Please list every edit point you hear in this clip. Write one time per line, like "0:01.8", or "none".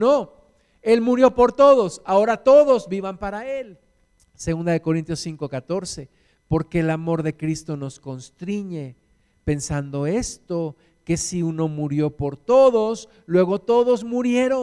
0:04.2